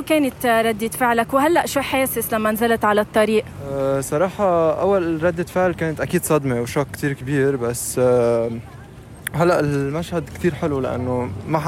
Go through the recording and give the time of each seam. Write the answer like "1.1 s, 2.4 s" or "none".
none